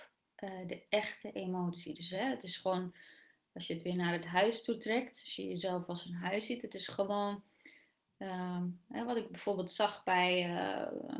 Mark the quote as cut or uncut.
uncut